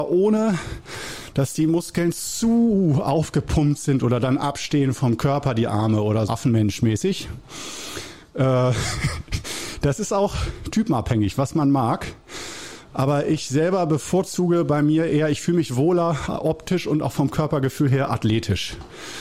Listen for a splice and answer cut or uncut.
cut